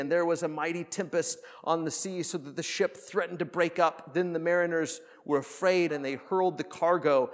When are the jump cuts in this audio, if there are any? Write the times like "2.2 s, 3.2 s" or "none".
5.9 s